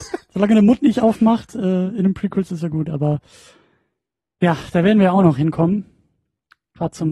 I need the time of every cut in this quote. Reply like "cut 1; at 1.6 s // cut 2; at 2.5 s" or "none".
none